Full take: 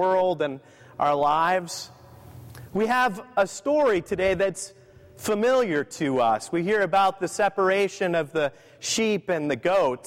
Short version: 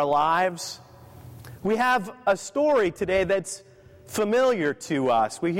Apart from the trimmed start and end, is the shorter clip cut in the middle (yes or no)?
no